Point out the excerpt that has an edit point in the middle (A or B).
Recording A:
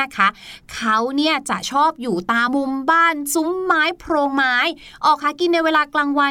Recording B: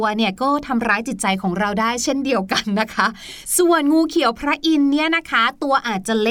A